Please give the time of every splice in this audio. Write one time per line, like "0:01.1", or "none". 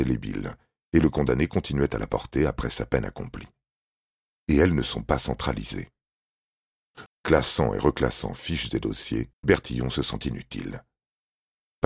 0:04.4
0:07.1
0:09.3